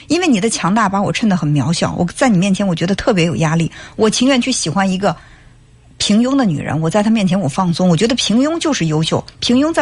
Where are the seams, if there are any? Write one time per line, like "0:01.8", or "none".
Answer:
none